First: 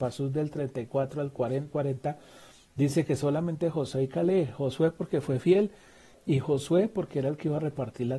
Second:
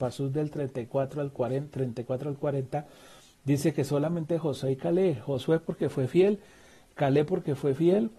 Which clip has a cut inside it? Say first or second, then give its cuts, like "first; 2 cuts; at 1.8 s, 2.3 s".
first; 2 cuts; at 1.7 s, 6.1 s